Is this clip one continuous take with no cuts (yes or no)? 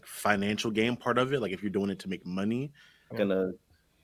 no